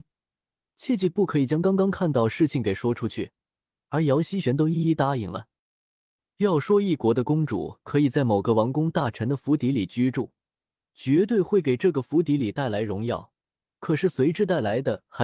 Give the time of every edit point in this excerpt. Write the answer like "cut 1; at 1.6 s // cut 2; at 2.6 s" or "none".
none

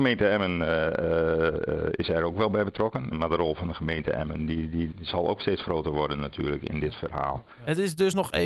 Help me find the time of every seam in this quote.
cut 1; at 3.1 s // cut 2; at 4.9 s

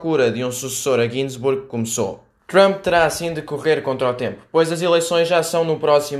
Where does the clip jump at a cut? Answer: cut 1; at 2.4 s

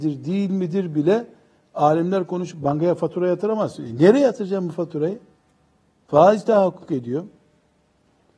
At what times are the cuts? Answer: none

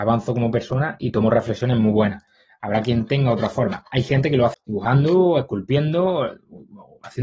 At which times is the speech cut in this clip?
cut 1; at 4.5 s

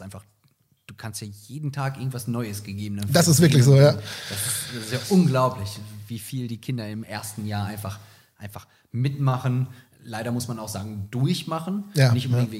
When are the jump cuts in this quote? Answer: none

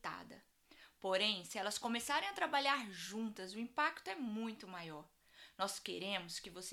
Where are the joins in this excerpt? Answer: none

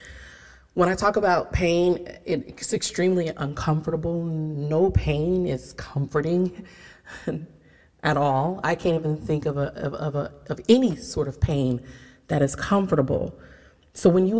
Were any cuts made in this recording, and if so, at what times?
none

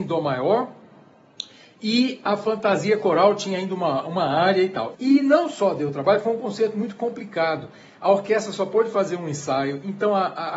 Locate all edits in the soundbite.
cut 1; at 4.9 s

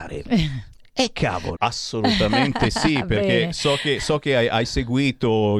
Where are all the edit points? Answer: cut 1; at 1.6 s

